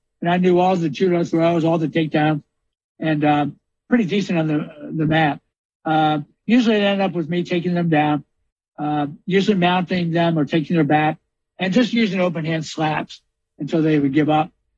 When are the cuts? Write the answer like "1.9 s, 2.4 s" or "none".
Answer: none